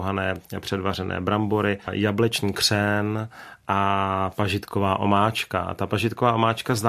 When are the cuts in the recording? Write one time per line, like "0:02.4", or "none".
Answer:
0:01.8